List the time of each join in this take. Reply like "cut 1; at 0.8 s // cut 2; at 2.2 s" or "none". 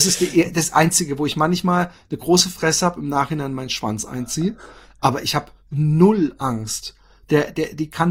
none